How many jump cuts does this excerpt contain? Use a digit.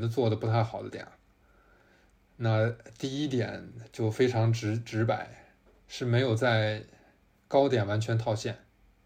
0